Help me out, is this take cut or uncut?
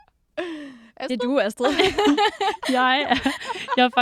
uncut